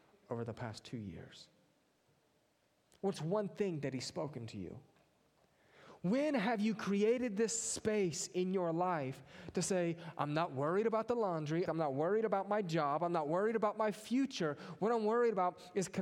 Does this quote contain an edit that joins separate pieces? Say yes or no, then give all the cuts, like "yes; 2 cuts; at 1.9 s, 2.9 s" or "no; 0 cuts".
yes; 1 cut; at 11.7 s